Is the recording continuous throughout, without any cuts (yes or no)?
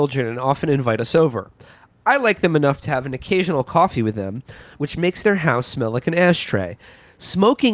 no